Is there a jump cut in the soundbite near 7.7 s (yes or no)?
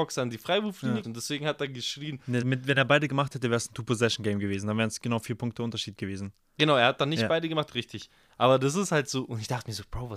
yes